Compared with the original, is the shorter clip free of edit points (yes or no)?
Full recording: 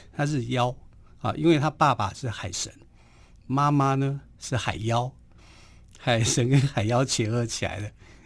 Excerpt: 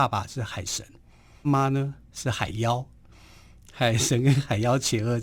no